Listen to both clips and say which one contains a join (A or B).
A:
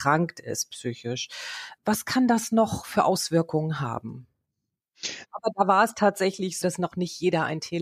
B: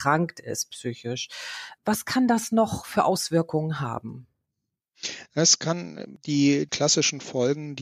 A